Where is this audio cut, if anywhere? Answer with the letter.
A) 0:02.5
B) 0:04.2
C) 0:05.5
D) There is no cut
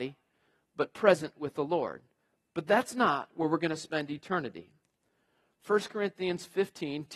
D